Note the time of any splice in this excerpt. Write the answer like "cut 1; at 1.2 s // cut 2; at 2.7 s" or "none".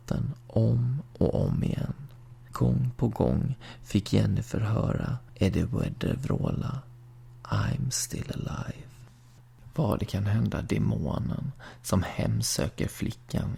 none